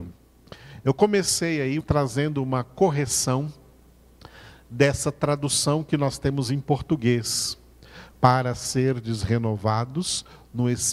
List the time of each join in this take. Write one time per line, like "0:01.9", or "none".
0:01.8
0:08.1